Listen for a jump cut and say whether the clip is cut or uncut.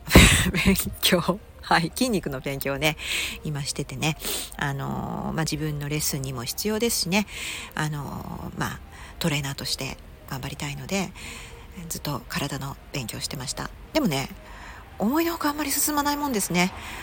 uncut